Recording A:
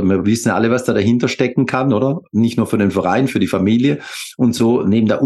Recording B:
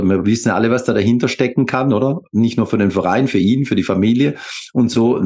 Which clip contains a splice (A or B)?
A